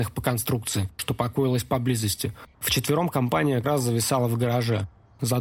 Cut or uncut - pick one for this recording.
cut